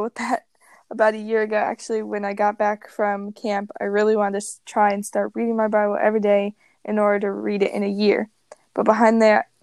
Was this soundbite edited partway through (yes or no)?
no